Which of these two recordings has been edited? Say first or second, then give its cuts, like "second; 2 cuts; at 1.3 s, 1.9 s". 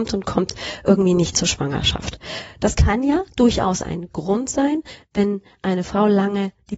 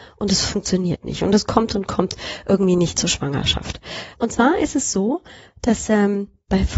second; 1 cut; at 4.1 s